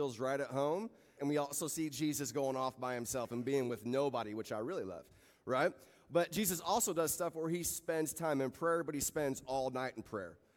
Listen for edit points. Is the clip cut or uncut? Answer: cut